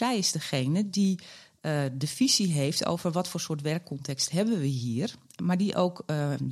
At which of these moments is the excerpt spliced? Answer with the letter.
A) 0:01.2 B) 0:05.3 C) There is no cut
C